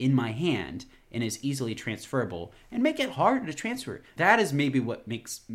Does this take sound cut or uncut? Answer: cut